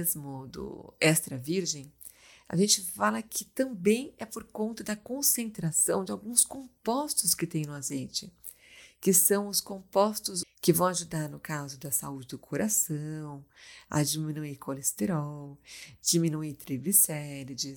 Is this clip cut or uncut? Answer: cut